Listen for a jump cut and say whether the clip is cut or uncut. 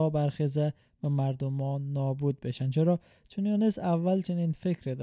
uncut